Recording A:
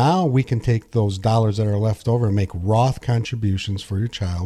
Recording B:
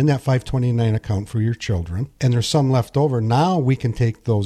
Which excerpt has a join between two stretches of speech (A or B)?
B